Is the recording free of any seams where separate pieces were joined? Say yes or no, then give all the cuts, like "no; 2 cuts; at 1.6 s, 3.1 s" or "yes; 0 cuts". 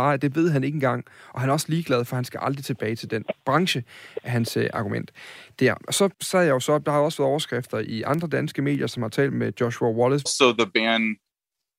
no; 2 cuts; at 6.1 s, 10.3 s